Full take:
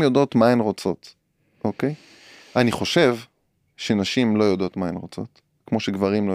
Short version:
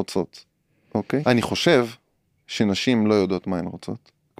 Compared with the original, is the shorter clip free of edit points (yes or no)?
no